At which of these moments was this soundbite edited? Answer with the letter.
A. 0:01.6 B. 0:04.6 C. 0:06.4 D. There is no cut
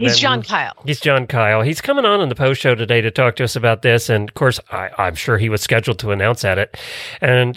D